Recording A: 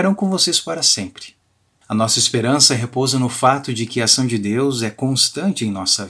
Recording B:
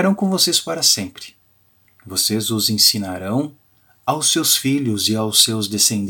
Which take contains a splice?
A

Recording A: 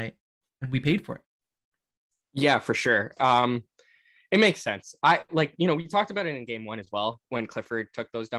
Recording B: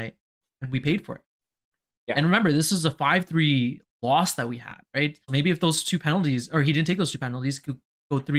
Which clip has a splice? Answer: B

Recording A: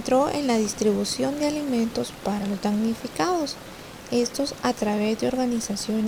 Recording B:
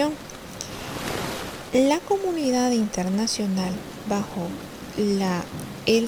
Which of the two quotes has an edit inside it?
B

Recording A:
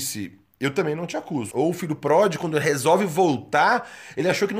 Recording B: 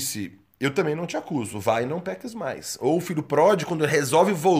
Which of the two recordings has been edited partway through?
A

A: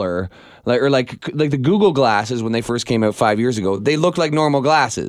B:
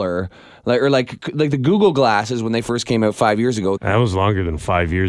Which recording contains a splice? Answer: B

